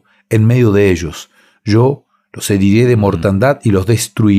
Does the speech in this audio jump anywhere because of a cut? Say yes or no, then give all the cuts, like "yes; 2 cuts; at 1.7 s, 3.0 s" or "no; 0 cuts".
no; 0 cuts